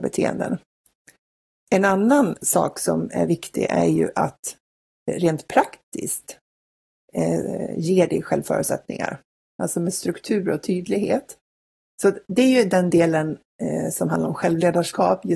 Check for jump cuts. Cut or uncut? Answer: cut